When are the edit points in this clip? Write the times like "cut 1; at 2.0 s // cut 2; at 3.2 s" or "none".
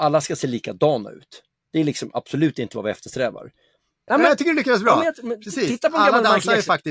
cut 1; at 4.1 s